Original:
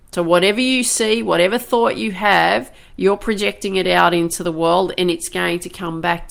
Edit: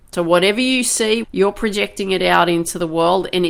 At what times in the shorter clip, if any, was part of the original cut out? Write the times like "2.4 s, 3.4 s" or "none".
1.2 s